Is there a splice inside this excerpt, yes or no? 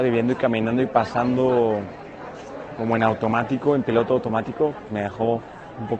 yes